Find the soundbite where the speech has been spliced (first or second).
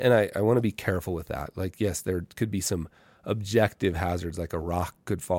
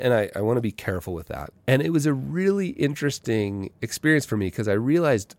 second